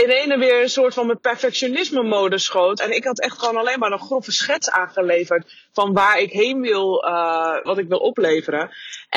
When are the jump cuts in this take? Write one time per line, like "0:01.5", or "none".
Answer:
0:02.8
0:07.7